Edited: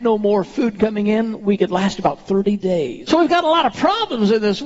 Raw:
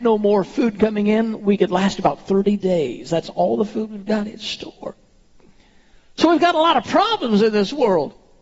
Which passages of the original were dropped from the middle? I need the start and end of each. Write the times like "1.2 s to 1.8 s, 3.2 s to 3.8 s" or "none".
3.0 s to 6.2 s

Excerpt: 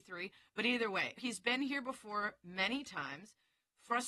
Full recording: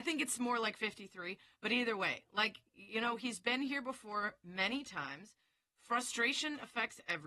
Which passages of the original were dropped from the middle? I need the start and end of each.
2.2 s to 3.2 s

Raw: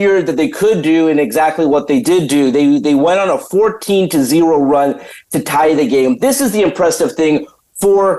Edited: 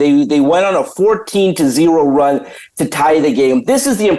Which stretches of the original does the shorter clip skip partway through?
none

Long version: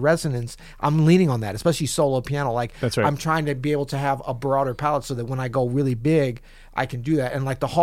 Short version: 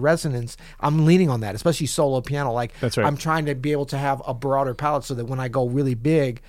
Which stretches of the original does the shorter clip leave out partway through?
none

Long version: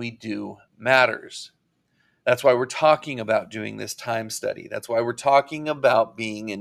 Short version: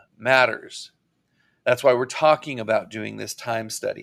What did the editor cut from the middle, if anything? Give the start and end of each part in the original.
none

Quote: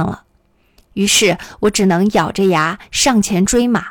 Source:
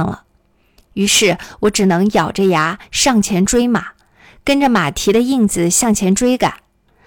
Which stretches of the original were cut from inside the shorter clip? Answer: none

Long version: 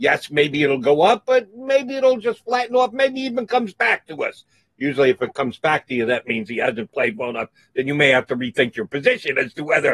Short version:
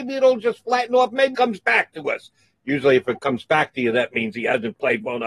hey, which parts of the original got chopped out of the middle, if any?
3.1 s to 3.5 s

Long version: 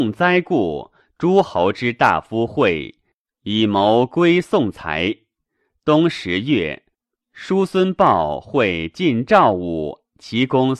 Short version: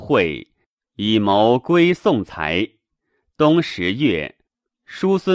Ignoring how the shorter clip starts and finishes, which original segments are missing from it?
none

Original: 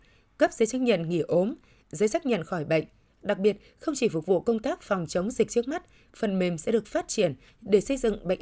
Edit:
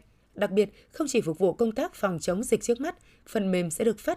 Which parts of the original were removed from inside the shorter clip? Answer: none

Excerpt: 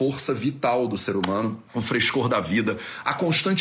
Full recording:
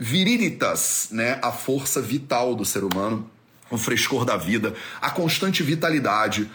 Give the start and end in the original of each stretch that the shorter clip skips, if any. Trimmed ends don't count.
3.3 s to 3.6 s

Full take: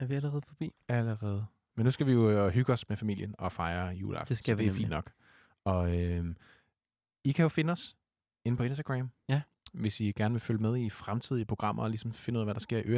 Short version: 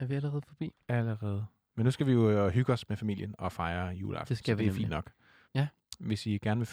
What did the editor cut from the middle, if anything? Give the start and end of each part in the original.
5.5 s to 9.2 s

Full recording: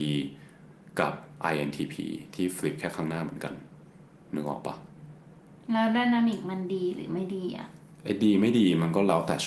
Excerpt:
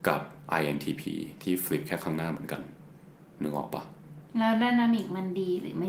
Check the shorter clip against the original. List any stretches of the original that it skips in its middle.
5.2 s to 5.6 s

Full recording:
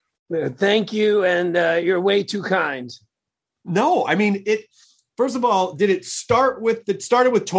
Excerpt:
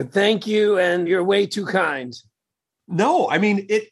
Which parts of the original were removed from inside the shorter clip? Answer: 1.5 s to 1.8 s

